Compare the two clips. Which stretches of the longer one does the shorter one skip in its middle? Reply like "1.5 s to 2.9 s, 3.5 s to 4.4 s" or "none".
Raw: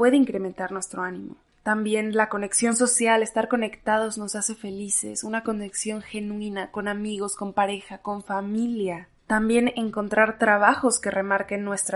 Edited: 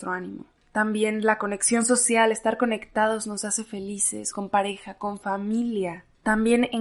5.2 s to 7.4 s